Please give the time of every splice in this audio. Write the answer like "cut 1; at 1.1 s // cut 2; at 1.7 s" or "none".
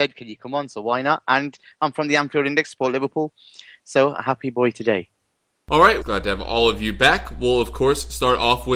cut 1; at 6.0 s